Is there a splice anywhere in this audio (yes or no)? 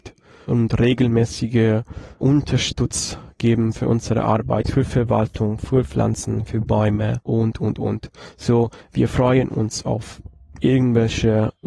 no